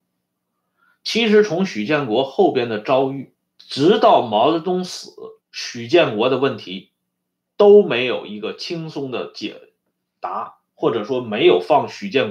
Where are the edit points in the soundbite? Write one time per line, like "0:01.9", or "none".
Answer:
0:03.5
0:05.4